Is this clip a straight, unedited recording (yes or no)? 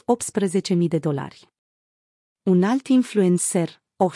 yes